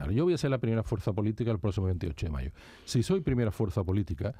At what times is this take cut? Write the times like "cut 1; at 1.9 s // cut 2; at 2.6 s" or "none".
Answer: none